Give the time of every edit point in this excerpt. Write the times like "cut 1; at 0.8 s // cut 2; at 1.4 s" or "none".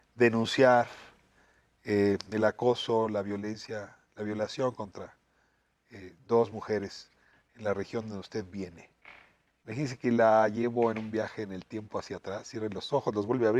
none